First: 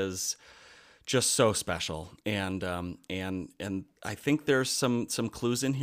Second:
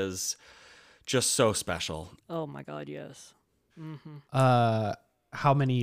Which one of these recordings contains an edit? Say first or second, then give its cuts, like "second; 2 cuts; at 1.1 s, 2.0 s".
second; 2 cuts; at 2.2 s, 3.7 s